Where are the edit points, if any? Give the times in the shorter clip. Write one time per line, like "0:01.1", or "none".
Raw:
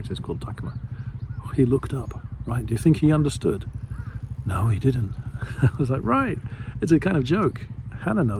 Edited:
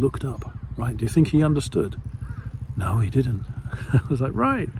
none